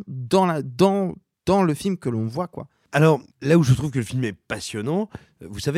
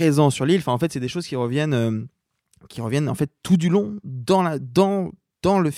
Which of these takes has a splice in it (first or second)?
first